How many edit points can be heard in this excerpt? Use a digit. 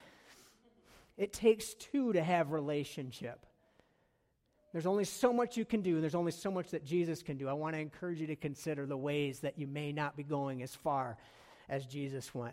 0